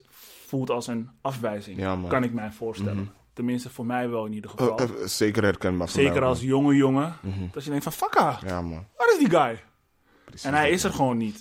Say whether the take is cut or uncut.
uncut